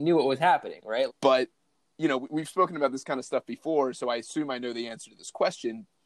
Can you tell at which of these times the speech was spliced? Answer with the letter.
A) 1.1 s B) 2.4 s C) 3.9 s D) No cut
A